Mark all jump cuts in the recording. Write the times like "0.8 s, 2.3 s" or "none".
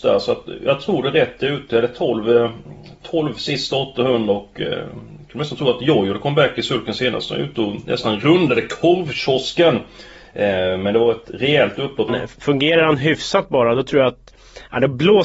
12.1 s